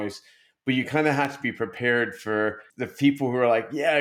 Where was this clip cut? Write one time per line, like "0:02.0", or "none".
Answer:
0:02.7